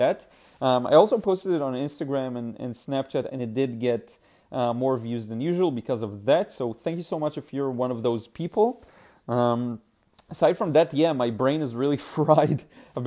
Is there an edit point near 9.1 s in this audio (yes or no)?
no